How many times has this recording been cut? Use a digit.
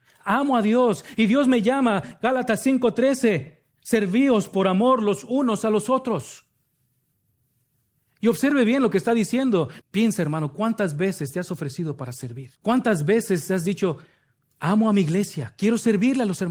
3